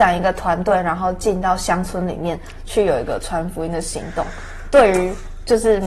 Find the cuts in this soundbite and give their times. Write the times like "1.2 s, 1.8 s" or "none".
none